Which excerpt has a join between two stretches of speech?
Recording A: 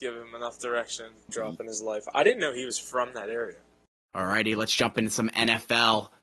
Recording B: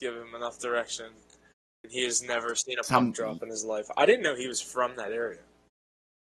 A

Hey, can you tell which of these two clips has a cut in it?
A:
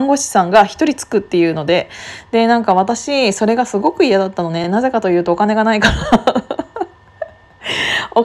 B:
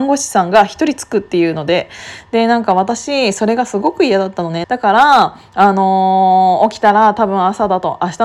B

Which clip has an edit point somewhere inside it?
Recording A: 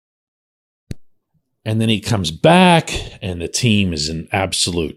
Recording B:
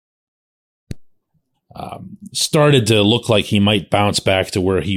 B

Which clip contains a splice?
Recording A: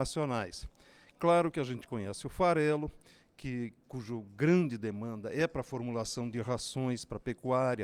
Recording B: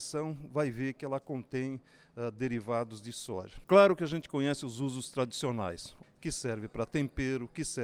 B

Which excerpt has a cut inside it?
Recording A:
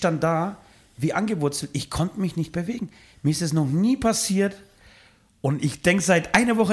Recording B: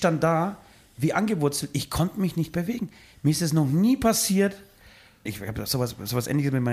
B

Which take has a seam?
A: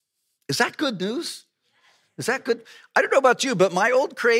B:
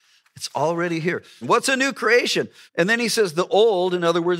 B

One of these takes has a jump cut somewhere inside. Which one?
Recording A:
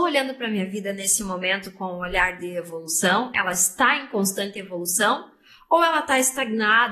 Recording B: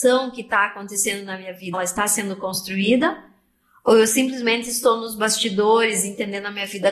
B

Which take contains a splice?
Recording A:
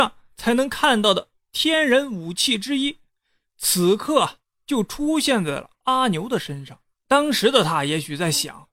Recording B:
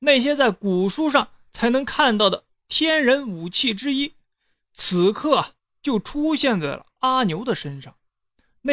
A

